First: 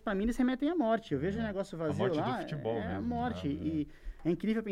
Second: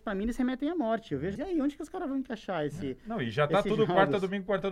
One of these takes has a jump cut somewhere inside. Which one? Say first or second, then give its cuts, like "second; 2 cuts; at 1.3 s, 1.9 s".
second; 1 cut; at 1.4 s